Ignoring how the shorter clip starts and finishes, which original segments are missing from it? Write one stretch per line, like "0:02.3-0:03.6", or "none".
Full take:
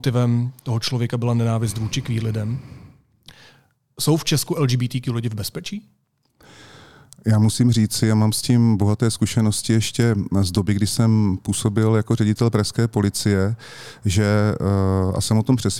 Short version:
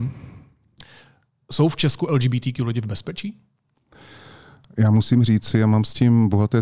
none